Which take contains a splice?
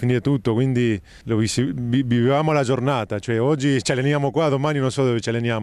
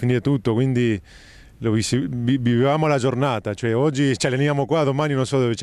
first; 1 cut; at 1.2 s

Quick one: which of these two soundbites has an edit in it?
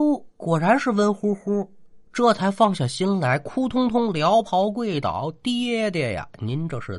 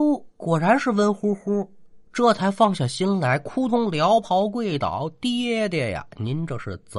second; 1 cut; at 3.7 s

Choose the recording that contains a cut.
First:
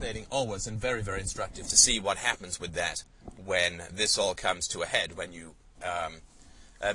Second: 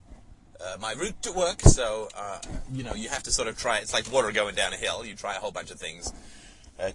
first; 1 cut; at 5.7 s

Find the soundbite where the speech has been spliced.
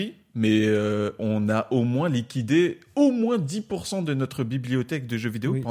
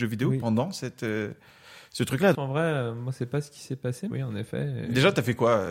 second; 2 cuts; at 2.3 s, 4.1 s

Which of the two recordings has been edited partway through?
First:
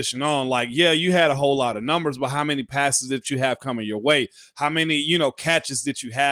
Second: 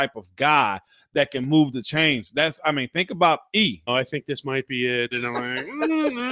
second; 2 cuts; at 3.9 s, 5.1 s

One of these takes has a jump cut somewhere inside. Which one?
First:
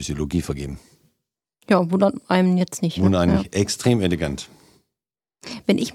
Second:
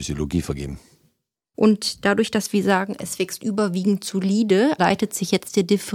second; 2 cuts; at 1.5 s, 4.8 s

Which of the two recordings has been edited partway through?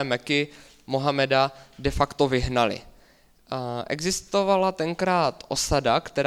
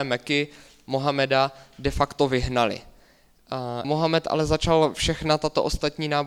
second; 1 cut; at 3.8 s

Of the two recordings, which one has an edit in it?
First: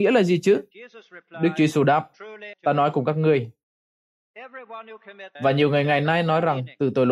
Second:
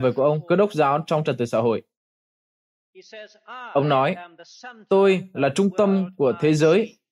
first; 2 cuts; at 2.5 s, 5.3 s

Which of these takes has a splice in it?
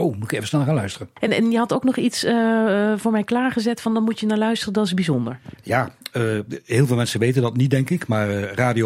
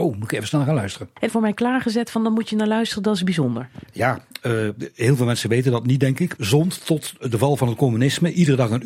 second; 2 cuts; at 1.3 s, 6.4 s

